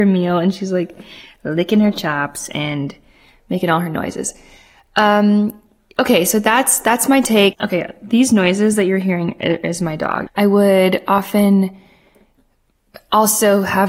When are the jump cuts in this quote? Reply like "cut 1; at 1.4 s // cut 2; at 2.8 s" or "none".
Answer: cut 1; at 7.5 s // cut 2; at 10.3 s